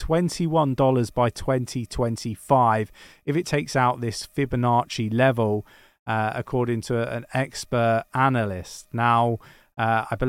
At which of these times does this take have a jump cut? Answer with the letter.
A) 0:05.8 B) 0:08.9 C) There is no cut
C